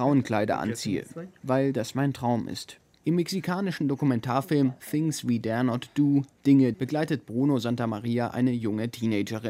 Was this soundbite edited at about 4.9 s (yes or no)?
no